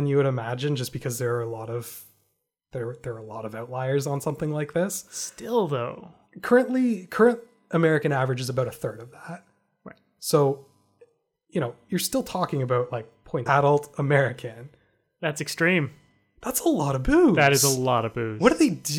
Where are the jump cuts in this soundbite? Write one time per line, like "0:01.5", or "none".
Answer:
0:13.5

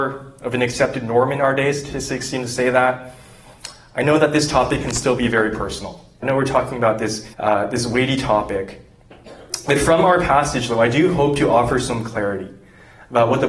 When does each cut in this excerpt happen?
0:06.2
0:07.3

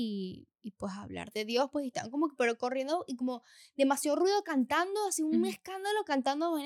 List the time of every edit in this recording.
none

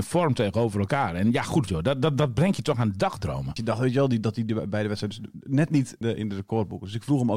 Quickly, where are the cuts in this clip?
0:01.7
0:03.6
0:06.0

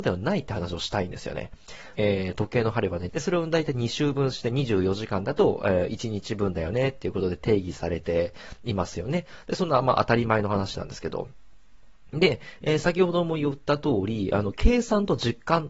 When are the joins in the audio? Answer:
0:02.0
0:03.1

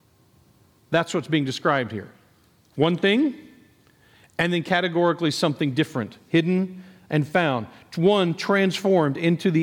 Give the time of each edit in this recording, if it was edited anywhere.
none

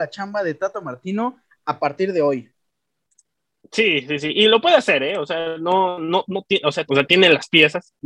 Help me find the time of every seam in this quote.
0:06.9

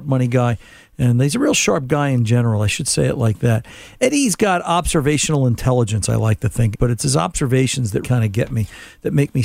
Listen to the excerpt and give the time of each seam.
0:06.7
0:08.0

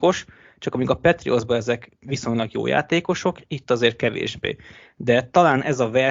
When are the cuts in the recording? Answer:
none

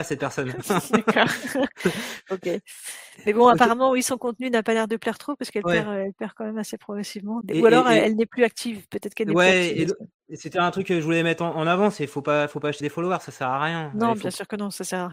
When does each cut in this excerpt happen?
0:07.4
0:12.8

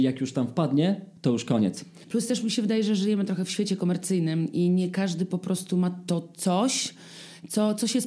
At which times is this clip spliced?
0:02.0

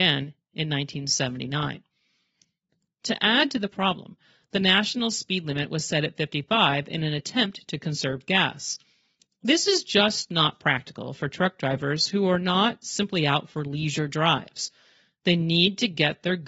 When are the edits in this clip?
0:02.9

